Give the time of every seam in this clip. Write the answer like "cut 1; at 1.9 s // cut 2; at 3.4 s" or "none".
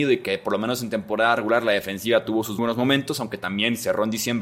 cut 1; at 2.6 s